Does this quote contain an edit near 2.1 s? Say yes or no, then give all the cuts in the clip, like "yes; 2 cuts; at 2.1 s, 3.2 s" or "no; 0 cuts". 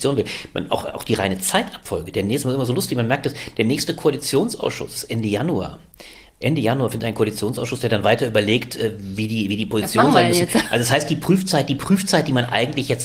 no; 0 cuts